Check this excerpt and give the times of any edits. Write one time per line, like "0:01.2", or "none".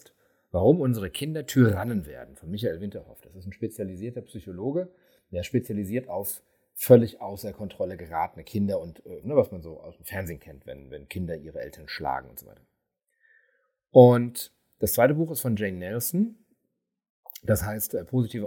0:09.2